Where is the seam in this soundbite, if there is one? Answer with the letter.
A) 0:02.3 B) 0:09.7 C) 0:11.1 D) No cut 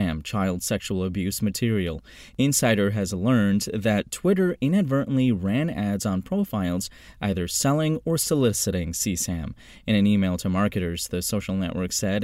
D